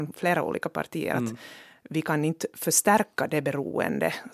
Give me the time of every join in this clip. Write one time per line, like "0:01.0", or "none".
none